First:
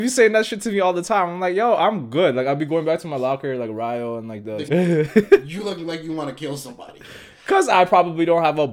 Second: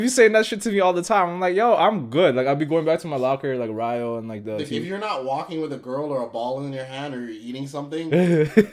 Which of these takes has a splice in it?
first; 1 cut; at 4.7 s

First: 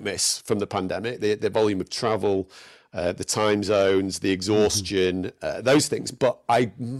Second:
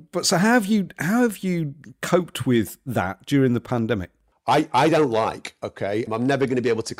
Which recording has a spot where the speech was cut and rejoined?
second; 2 cuts; at 4.3 s, 6.1 s

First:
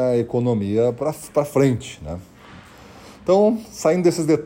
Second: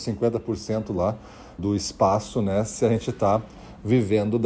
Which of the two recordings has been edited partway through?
second; 1 cut; at 1.6 s

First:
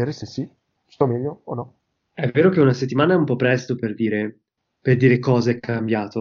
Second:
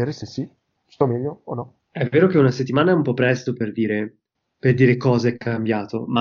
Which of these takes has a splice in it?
second; 1 cut; at 1.8 s

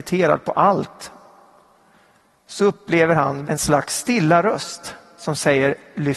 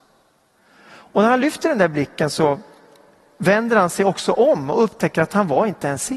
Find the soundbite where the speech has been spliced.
first; 1 cut; at 3.4 s

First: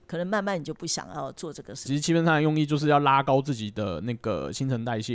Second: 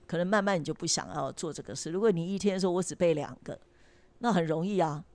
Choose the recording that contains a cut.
first; 1 cut; at 1.8 s

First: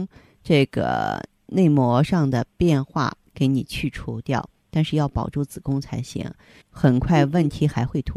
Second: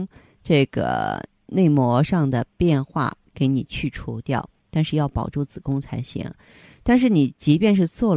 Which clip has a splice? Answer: first; 1 cut; at 6.6 s

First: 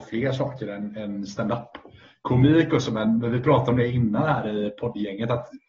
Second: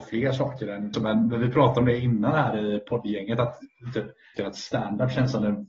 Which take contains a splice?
second; 2 cuts; at 0.9 s, 4.4 s

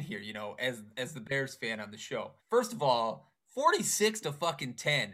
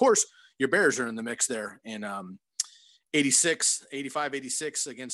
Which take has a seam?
first; 1 cut; at 2.4 s

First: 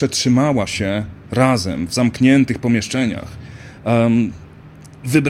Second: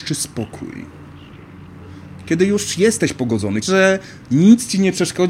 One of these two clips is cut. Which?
second; 1 cut; at 3.6 s

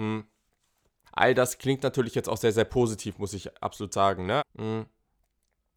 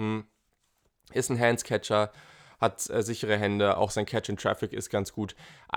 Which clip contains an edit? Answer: first; 2 cuts; at 1.1 s, 4.4 s

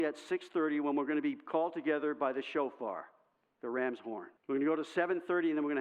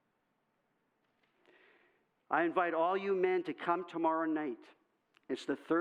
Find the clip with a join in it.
first; 1 cut; at 4.4 s

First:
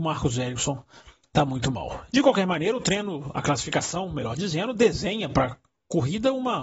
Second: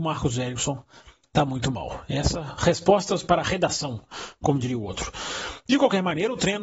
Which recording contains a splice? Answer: first; 1 cut; at 2.1 s

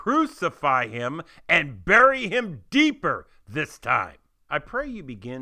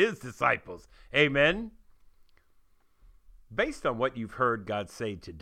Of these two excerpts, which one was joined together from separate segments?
first; 1 cut; at 4.5 s

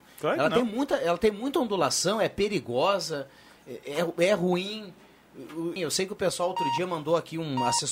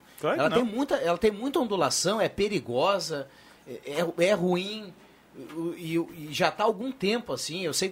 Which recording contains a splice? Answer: first; 1 cut; at 5.8 s

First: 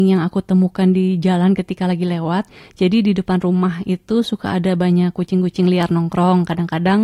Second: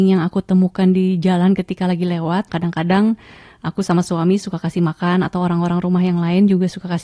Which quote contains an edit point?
second; 1 cut; at 2.5 s

